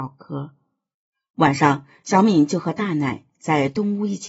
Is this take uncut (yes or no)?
yes